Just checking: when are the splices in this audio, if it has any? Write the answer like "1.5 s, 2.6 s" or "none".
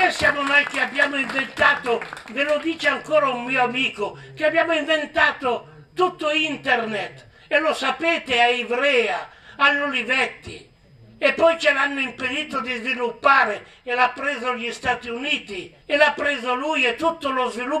15.8 s